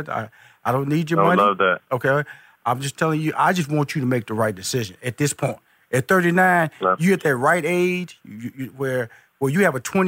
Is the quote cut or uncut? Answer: uncut